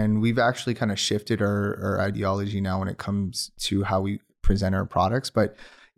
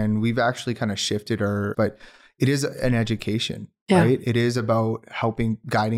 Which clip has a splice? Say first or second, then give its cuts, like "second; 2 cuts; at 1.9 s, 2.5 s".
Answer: second; 1 cut; at 1.7 s